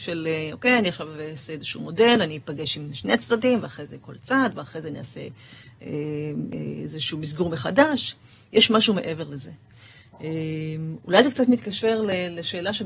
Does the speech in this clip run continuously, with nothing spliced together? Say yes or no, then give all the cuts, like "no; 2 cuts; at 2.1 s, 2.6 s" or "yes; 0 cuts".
yes; 0 cuts